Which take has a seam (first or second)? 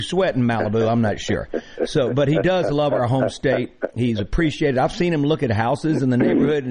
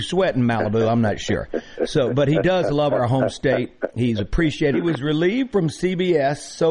second